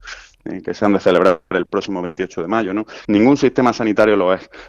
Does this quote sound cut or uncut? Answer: cut